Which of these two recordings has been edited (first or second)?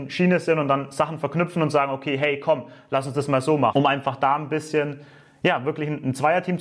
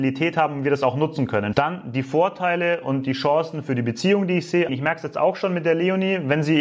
second